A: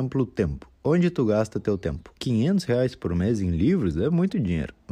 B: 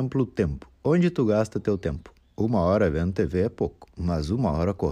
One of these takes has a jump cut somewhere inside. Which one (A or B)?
A